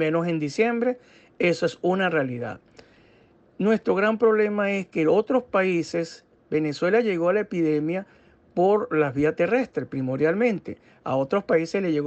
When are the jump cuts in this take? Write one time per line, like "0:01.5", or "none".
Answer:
none